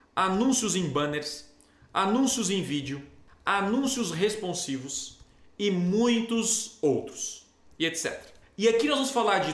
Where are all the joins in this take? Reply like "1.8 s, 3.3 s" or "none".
none

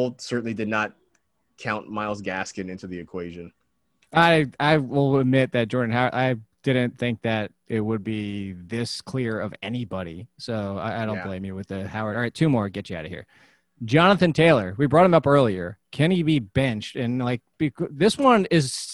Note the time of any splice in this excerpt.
none

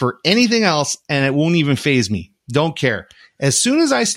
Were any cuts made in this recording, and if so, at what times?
none

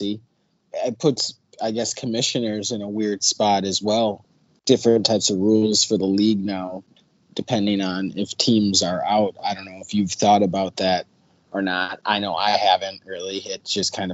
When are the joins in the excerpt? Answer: none

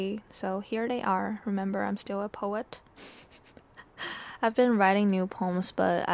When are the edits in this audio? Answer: none

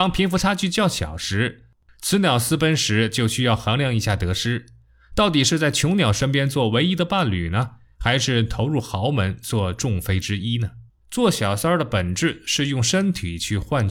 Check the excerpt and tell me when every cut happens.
10.9 s

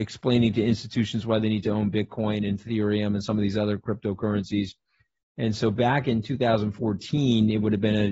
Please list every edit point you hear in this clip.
none

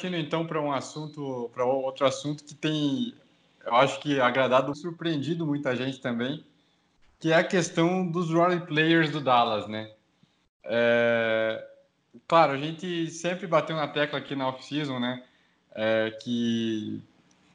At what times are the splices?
4.7 s

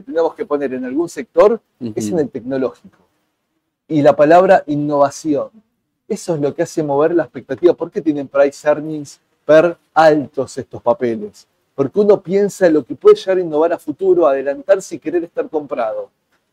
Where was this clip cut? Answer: 9.9 s

